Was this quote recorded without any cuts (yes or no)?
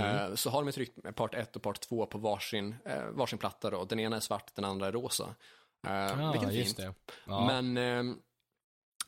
yes